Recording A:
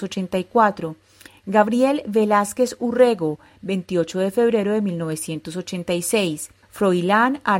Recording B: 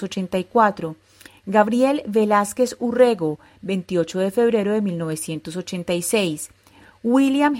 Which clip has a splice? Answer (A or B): A